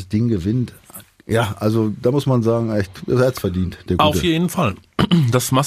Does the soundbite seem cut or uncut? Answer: uncut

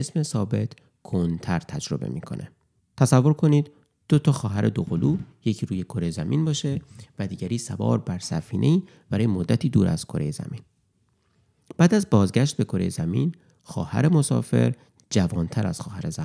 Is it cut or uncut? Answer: cut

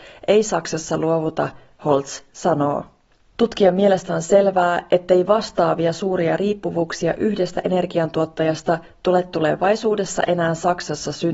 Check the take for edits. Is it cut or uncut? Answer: uncut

